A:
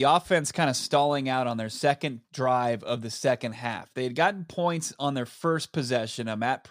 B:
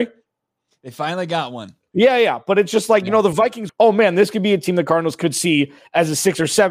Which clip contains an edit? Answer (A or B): B